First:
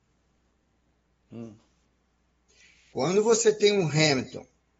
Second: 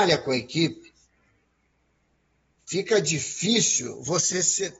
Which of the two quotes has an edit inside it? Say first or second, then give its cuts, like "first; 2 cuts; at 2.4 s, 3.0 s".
first; 1 cut; at 1.3 s